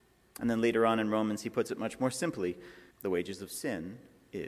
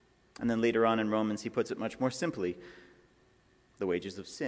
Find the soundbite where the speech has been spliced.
first; 1 cut; at 2.9 s

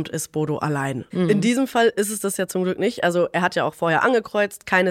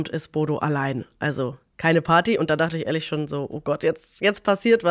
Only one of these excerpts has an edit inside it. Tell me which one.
first; 1 cut; at 1.1 s

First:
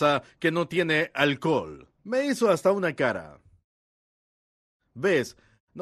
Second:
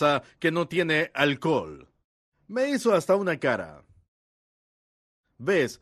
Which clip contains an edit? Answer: first; 1 cut; at 2.0 s

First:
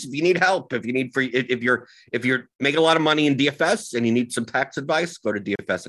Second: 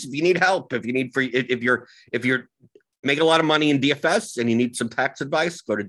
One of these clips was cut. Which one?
first; 1 cut; at 2.5 s

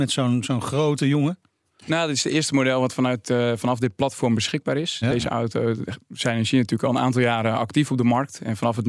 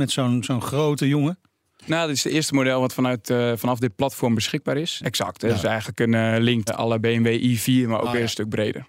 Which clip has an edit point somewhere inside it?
second; 2 cuts; at 5.0 s, 6.7 s

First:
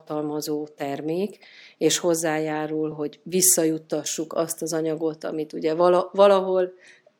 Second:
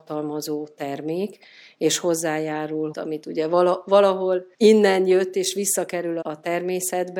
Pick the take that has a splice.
second; 3 cuts; at 2.9 s, 4.5 s, 6.2 s

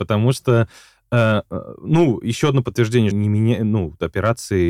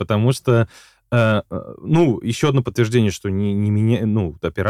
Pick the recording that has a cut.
first; 1 cut; at 3.1 s

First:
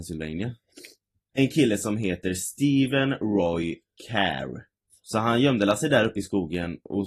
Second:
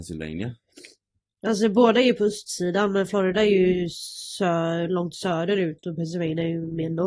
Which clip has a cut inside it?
first; 2 cuts; at 1.3 s, 4.9 s

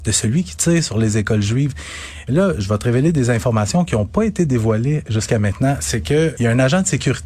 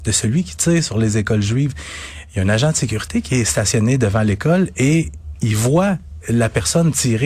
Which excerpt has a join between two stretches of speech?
first; 2 cuts; at 2.3 s, 6.4 s

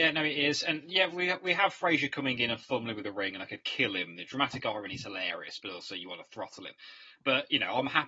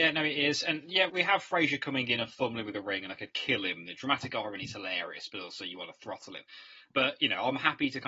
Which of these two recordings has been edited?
second; 1 cut; at 1.1 s

